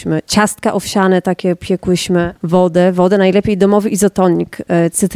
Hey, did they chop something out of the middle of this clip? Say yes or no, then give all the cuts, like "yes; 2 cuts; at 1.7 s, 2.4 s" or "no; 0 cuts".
no; 0 cuts